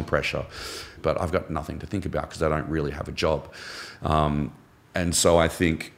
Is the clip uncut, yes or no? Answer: no